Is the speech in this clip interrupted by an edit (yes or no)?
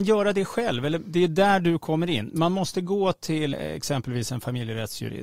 yes